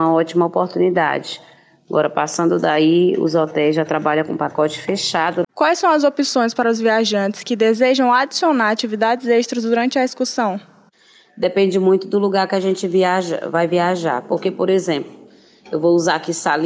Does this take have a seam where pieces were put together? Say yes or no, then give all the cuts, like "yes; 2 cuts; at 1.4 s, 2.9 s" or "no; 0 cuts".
yes; 1 cut; at 5.4 s